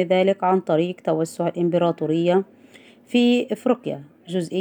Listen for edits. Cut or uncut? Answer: uncut